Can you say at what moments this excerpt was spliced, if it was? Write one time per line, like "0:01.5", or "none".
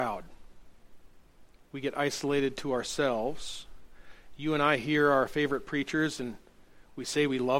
none